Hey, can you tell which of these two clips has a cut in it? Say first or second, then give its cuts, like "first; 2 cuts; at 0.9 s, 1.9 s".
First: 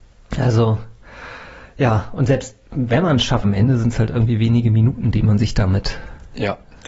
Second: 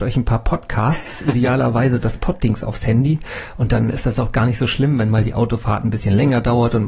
first; 1 cut; at 3.4 s